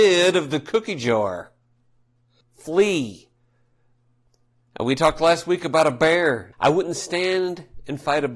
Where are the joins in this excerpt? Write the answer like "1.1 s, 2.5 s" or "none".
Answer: 2.4 s, 6.5 s